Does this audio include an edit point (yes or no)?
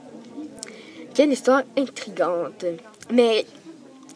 no